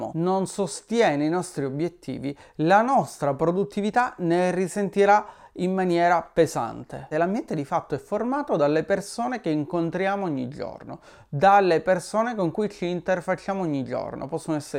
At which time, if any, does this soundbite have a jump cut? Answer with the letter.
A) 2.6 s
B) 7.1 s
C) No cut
B